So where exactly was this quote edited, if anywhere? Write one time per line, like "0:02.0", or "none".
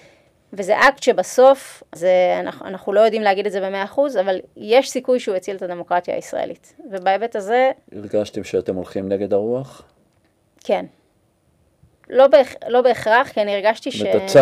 0:01.9
0:12.1